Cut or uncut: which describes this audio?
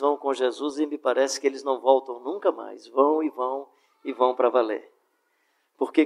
uncut